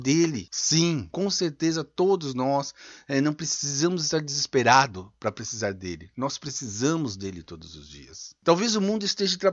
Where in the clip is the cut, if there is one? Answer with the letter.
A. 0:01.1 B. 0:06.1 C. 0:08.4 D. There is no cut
A